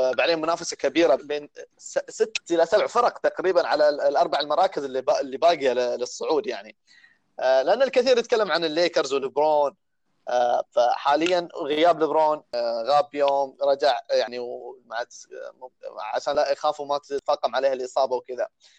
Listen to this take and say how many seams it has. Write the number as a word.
one